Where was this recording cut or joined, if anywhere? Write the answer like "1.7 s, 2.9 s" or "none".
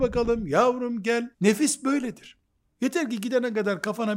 1.3 s, 2.7 s